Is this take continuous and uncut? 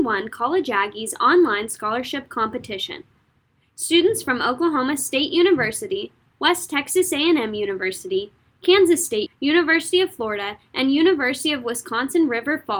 no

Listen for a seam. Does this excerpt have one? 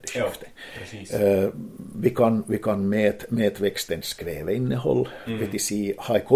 no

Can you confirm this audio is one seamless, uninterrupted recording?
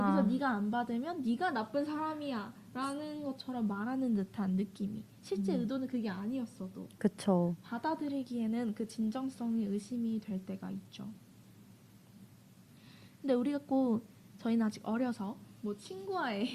yes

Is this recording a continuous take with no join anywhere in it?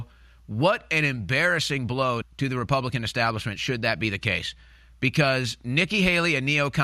no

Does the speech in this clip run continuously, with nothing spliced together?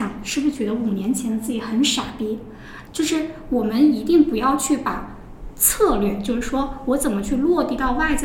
no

